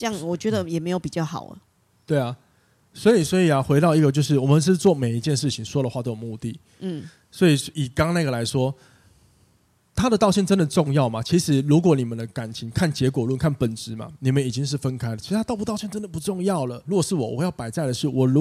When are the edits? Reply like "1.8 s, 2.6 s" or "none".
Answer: 7.7 s, 16.9 s